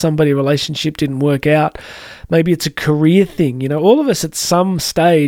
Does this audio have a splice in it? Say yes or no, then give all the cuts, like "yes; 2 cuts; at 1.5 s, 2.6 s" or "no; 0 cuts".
no; 0 cuts